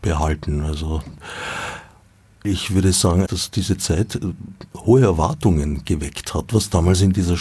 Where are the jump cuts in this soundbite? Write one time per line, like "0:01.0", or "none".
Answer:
0:03.3
0:06.5